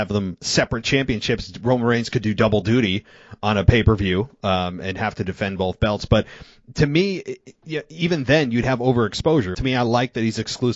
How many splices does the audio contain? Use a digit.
1